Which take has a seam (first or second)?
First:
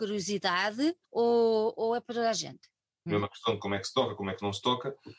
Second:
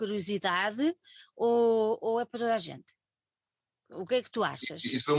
first